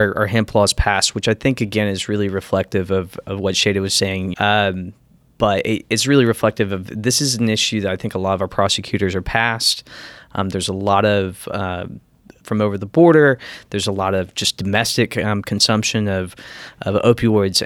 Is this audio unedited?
no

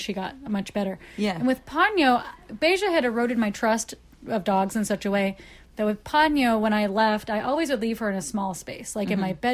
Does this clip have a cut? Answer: no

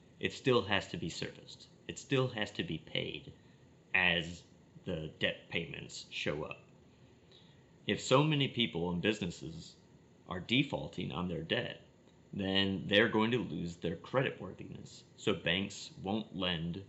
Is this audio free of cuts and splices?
no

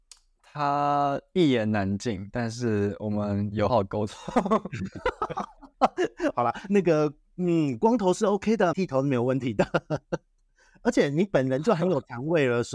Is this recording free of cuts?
no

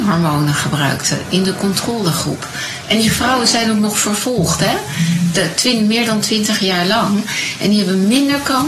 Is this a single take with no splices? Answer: no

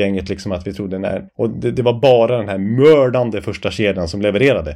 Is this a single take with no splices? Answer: no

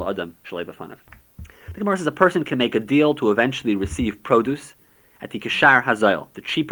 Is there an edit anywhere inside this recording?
no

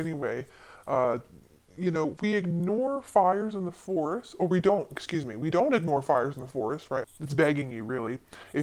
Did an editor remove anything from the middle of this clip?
yes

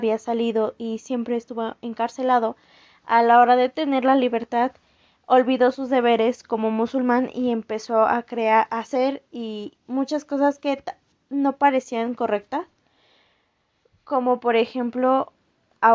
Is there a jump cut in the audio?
no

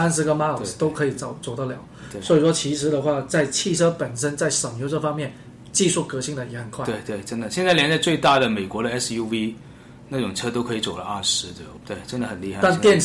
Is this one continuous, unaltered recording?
yes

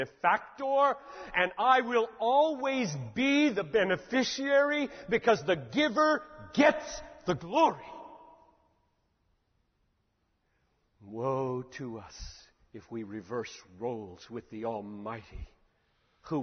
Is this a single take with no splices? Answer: yes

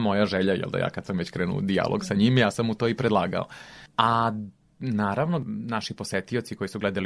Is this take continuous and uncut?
yes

